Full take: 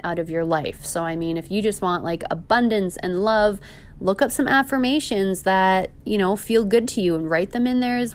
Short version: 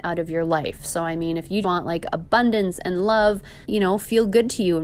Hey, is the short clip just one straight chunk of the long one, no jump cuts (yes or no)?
no